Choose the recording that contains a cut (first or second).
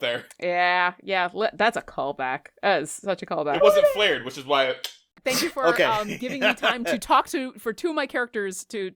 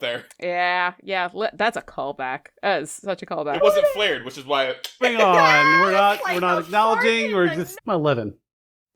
second